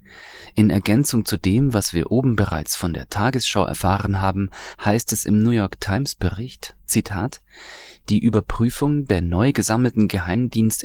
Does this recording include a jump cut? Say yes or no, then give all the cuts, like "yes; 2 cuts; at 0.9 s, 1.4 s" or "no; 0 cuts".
no; 0 cuts